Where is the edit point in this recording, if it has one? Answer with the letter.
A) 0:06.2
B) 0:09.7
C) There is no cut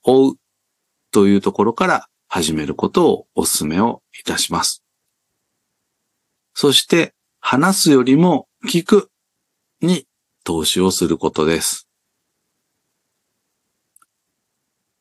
C